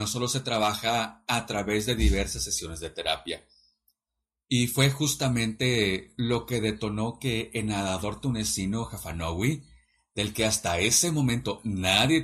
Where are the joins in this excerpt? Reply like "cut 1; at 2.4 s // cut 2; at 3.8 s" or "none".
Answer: none